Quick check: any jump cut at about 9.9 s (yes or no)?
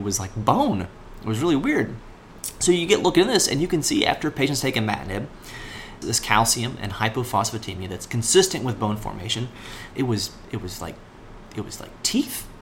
yes